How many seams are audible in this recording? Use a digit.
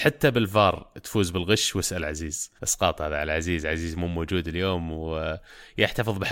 1